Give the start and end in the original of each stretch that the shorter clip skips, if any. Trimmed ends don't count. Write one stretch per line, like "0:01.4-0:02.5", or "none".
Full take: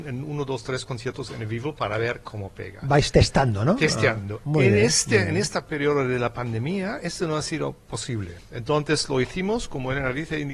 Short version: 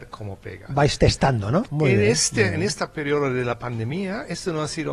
0:03.8-0:04.4